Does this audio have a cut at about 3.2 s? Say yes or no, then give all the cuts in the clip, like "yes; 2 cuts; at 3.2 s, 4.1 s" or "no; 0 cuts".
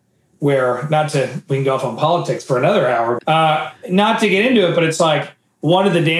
yes; 1 cut; at 3.2 s